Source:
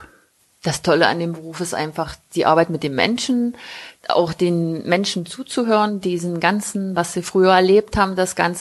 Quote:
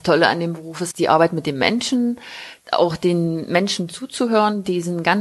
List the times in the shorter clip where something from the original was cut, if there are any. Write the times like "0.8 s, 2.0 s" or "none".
0.9 s

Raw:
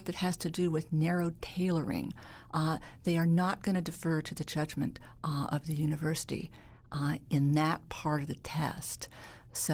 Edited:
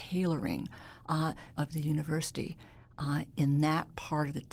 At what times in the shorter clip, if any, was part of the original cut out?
1.6 s

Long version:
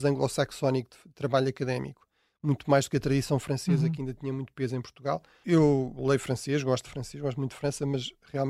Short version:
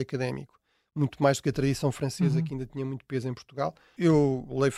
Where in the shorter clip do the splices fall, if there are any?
none

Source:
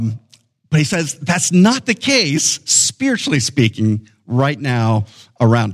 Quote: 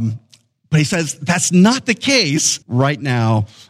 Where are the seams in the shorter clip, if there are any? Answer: 2.6 s

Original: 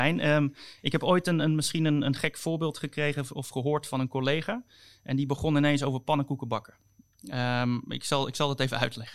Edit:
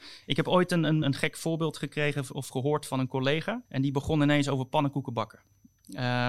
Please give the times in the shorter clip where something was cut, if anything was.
1.0 s, 3.6 s

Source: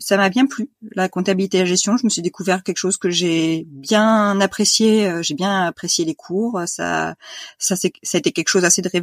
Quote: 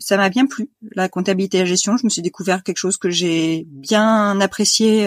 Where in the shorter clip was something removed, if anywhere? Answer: none

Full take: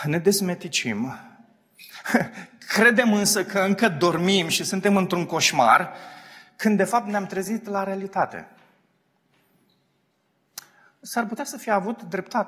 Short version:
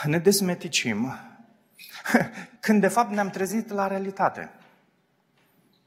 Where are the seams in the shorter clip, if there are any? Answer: 2.6 s

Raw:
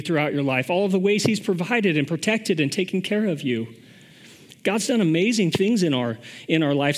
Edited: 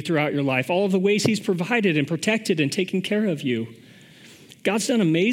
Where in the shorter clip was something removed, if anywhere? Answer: none

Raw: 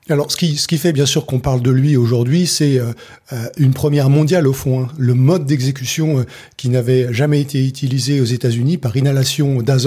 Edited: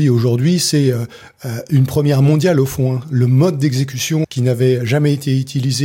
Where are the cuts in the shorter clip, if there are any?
4.2 s

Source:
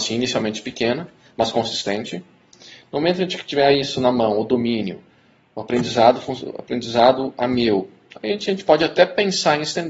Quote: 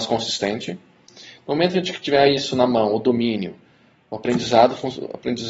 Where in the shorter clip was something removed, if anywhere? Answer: none

